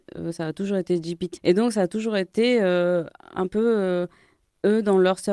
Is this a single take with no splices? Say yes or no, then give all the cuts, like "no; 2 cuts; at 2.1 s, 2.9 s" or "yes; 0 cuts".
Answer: no; 1 cut; at 1.4 s